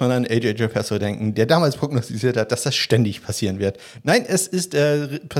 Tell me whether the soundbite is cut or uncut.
uncut